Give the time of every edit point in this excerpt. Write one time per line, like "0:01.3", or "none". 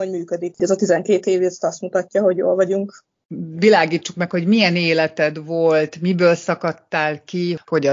none